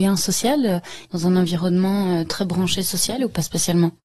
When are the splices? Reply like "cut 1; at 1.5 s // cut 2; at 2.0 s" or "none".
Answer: cut 1; at 1.0 s